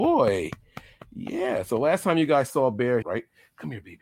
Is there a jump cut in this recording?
yes; 1 cut; at 3.0 s

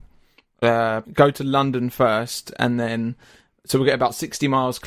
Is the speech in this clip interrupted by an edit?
yes; 1 cut; at 1.0 s

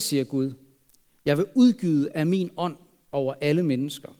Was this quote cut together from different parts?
no; 0 cuts

